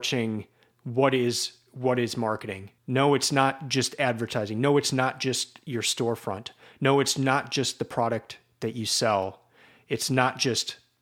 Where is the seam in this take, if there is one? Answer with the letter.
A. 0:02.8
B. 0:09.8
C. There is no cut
A